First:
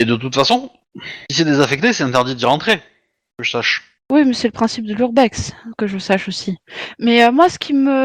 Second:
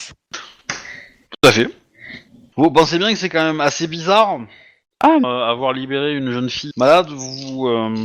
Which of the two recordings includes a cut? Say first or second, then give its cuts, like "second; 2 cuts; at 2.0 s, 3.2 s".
second; 3 cuts; at 2.5 s, 5.2 s, 6.7 s